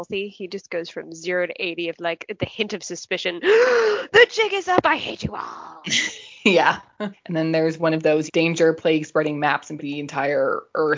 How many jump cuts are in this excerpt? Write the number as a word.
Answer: three